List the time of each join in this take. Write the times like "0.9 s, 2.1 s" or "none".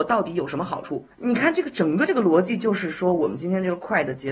1.1 s